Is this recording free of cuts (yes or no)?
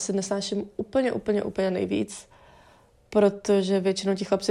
yes